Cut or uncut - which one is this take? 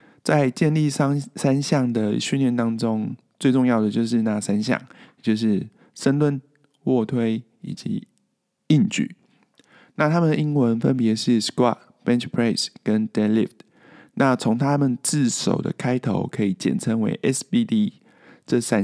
uncut